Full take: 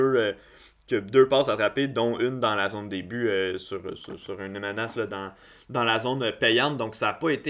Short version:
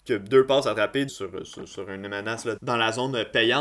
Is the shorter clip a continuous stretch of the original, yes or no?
no